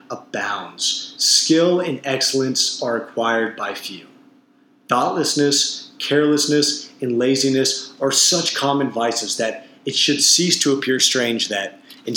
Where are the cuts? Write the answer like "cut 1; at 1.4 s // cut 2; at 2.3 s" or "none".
none